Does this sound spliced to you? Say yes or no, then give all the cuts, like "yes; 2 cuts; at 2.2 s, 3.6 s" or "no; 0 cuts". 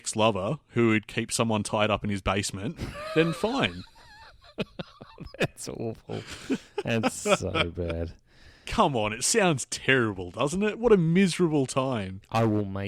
no; 0 cuts